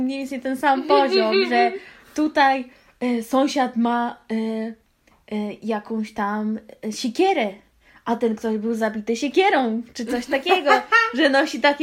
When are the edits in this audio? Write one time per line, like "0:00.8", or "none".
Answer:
none